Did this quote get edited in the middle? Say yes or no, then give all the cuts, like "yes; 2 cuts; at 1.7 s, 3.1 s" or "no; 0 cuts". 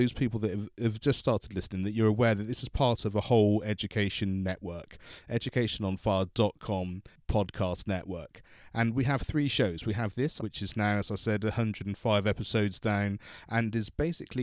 yes; 1 cut; at 10.4 s